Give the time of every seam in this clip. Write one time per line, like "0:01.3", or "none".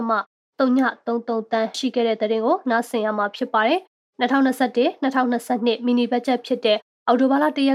0:01.7